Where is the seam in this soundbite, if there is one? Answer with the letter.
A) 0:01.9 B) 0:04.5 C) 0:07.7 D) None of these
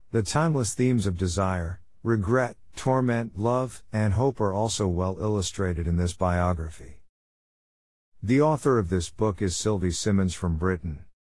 D